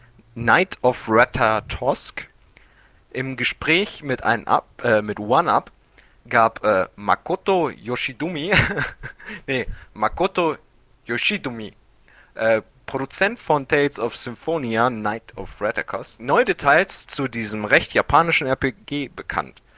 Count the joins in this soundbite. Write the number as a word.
zero